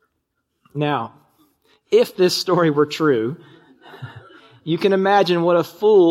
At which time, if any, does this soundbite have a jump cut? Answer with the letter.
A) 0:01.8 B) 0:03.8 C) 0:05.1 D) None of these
D